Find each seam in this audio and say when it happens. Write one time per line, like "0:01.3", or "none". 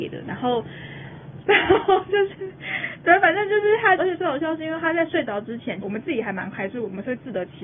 0:01.4
0:04.0
0:05.8